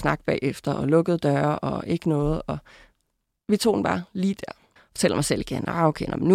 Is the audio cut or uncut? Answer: cut